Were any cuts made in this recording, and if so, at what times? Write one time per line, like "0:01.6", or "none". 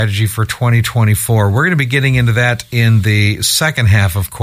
none